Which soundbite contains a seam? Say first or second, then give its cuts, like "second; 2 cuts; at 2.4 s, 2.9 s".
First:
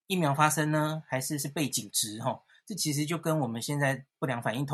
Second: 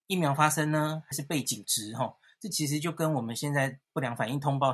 second; 1 cut; at 1.1 s